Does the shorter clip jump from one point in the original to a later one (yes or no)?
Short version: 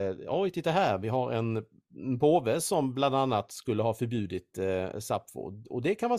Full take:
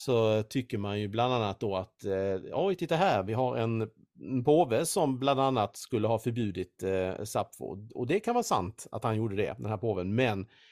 no